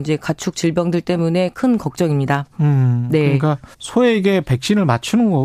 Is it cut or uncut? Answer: cut